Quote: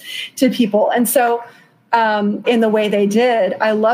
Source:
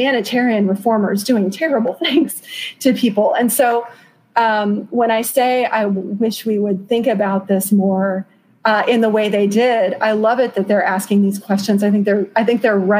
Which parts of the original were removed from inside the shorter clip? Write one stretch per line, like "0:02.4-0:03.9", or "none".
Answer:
0:04.9-0:08.8

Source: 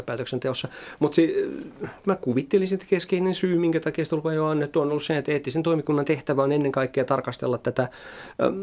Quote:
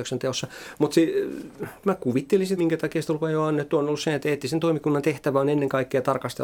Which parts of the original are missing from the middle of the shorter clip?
0:02.8-0:03.6

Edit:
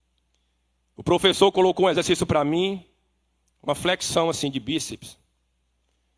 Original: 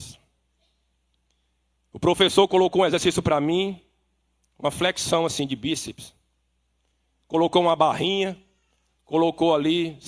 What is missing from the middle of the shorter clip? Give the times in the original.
none

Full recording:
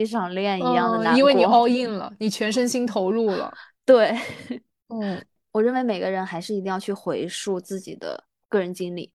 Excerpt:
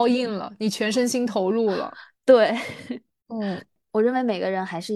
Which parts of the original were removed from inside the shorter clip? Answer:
none

